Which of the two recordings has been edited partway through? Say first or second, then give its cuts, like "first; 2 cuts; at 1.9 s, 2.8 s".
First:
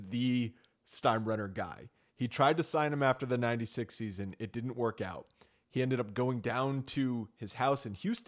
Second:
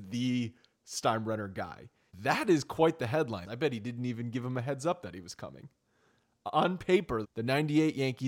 second; 3 cuts; at 2.1 s, 3.4 s, 7.2 s